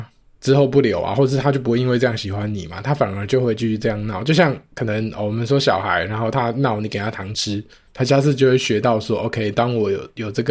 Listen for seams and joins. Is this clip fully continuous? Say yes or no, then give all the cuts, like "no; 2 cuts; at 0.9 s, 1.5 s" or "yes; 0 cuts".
yes; 0 cuts